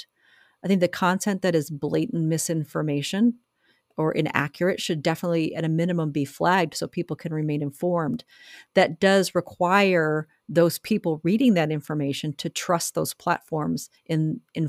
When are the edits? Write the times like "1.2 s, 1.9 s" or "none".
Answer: none

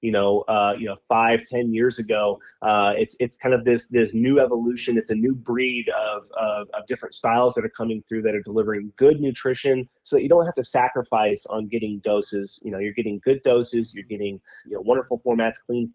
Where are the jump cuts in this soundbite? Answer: 11.5 s, 14.6 s

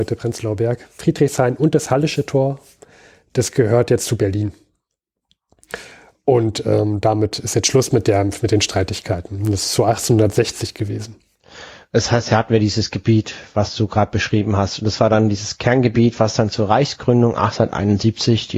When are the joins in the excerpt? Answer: none

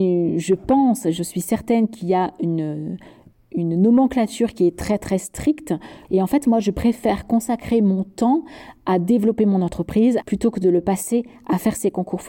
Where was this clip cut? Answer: 6.0 s, 10.2 s

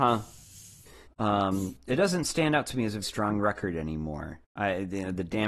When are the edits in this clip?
1.1 s, 3.0 s

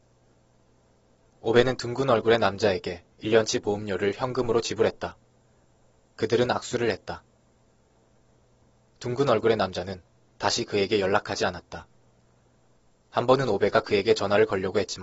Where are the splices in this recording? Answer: none

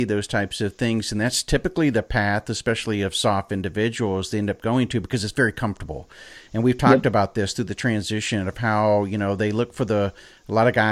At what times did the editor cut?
none

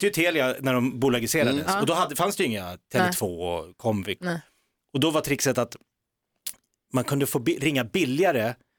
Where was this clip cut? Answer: 4.2 s

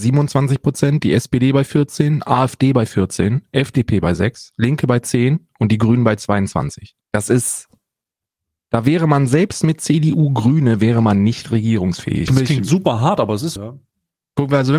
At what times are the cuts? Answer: 7.0 s, 12.3 s, 13.6 s

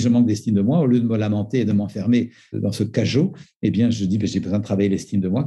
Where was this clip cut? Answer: none

